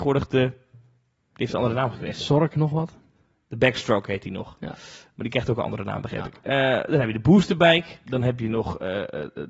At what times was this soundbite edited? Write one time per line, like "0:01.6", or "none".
0:08.0